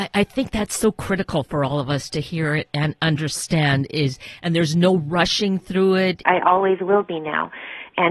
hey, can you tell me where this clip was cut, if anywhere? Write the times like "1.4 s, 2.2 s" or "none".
6.2 s